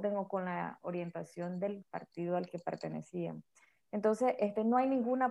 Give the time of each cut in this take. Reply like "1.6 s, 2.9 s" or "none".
none